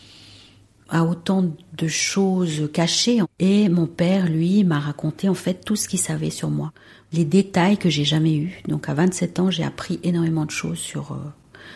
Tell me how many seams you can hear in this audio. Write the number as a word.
one